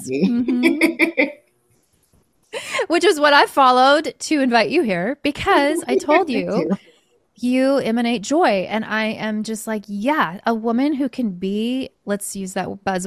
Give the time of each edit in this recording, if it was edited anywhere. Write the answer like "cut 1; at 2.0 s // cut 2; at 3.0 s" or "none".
none